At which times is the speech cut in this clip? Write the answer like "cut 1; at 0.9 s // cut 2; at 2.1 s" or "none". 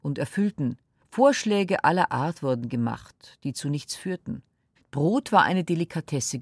cut 1; at 1.0 s // cut 2; at 4.8 s

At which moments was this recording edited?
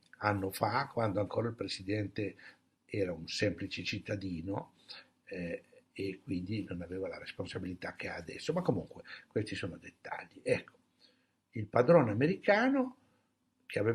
none

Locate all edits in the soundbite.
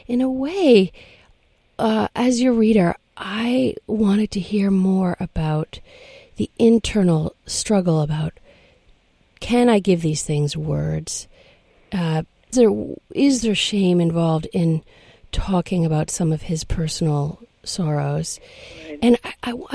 cut 1; at 12.5 s

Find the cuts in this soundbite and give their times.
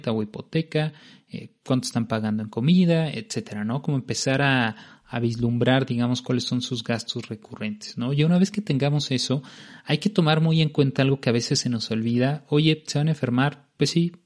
none

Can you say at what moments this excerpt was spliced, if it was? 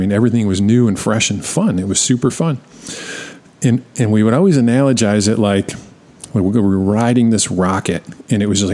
none

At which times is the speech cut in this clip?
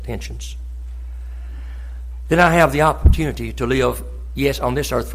none

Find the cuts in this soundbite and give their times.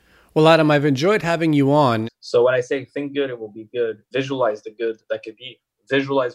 cut 1; at 2.0 s // cut 2; at 4.1 s

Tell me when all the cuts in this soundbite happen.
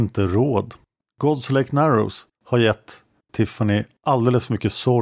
cut 1; at 1.0 s // cut 2; at 2.3 s

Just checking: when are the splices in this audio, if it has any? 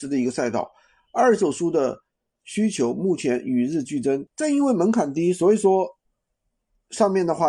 cut 1; at 4.3 s

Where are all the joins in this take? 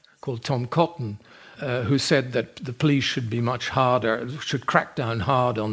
cut 1; at 1.5 s

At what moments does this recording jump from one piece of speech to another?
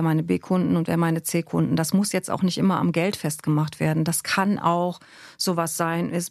none

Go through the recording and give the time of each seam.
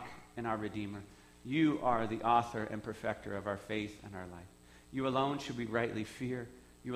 none

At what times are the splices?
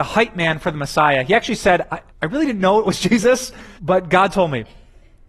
cut 1; at 2.1 s // cut 2; at 3.8 s

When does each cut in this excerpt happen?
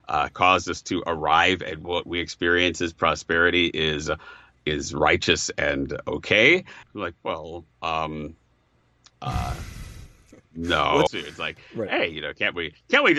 cut 1; at 6.8 s // cut 2; at 11.1 s

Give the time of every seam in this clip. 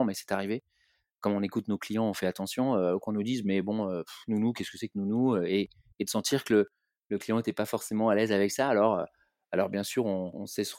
none

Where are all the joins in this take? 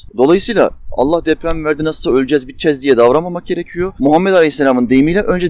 cut 1; at 4.0 s

